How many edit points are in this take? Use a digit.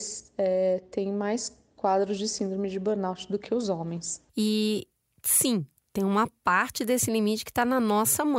1